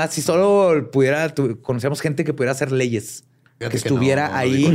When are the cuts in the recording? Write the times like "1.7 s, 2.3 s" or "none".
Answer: 3.6 s